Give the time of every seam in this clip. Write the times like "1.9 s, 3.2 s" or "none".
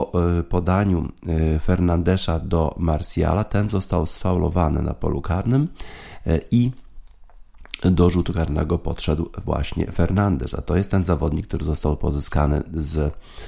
none